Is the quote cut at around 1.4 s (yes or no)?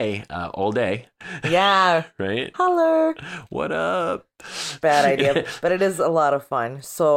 no